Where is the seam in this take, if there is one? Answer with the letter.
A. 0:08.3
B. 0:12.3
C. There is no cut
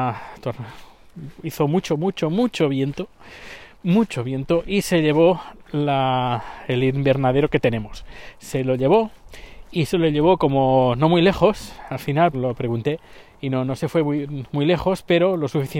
B